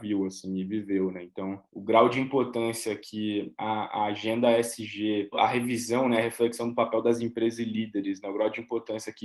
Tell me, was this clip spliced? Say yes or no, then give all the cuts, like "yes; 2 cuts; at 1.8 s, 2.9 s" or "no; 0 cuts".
no; 0 cuts